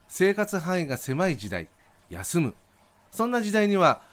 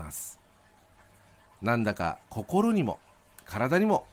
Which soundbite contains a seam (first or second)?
first